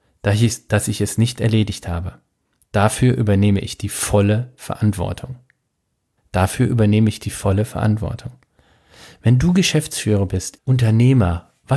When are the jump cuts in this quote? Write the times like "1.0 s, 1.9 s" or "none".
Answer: 6.2 s, 10.6 s